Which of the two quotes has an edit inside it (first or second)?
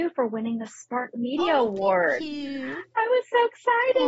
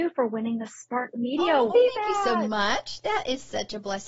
second